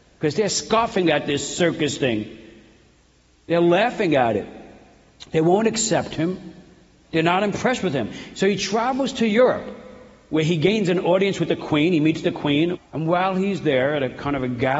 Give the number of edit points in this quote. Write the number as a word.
one